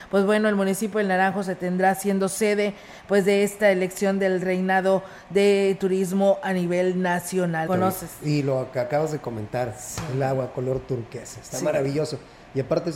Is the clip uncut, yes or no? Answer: no